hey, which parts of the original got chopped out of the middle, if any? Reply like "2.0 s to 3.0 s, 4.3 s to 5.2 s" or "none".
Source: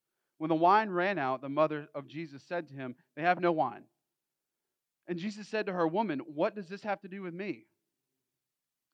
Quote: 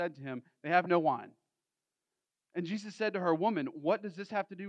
none